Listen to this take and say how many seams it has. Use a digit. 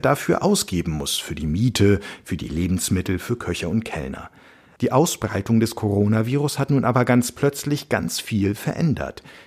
1